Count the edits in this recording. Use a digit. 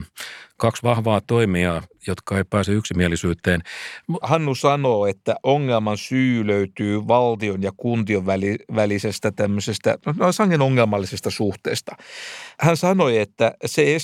1